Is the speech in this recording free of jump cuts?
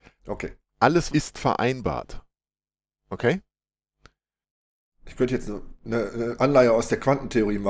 no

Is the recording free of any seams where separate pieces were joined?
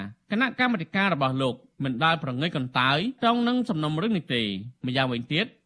no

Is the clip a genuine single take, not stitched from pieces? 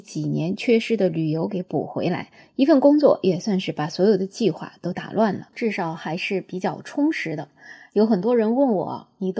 no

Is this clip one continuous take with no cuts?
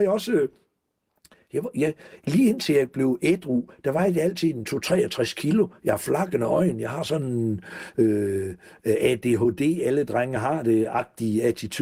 yes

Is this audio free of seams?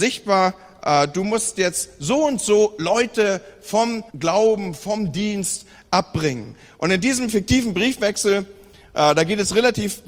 no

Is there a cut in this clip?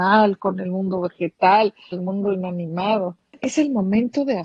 yes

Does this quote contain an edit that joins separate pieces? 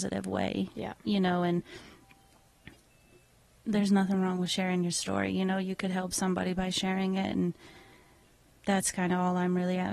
no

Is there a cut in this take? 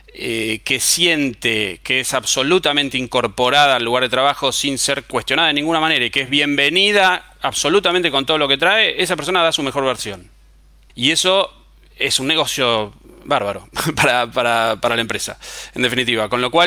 yes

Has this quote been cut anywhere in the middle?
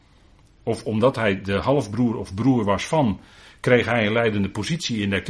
no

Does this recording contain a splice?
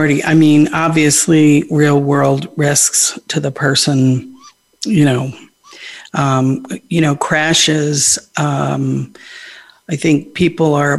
no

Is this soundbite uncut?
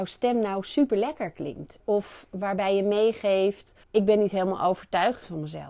no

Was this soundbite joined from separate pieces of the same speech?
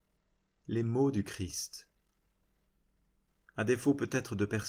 no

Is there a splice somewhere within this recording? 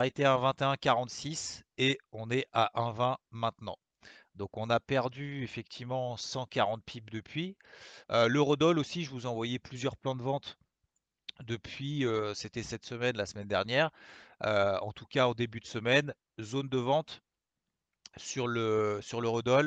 yes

